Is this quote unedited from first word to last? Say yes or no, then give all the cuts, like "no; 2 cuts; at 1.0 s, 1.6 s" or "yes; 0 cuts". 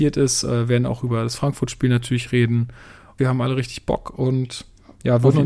no; 1 cut; at 3.2 s